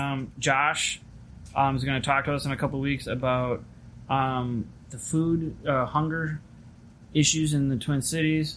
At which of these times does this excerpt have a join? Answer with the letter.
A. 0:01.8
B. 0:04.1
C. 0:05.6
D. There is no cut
D